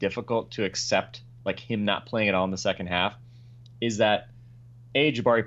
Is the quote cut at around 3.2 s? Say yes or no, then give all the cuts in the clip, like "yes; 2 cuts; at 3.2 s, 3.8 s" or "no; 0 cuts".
no; 0 cuts